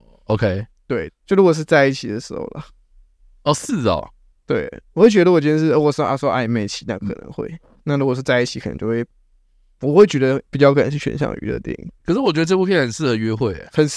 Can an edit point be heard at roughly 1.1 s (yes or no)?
yes